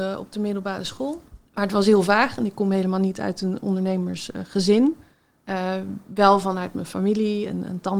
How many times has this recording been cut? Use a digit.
1